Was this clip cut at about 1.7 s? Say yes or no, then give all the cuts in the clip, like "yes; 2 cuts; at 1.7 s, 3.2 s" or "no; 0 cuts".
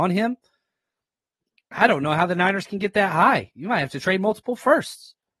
no; 0 cuts